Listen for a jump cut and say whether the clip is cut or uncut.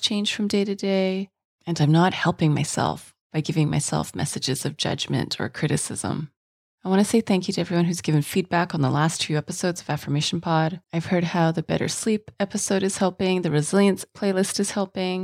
cut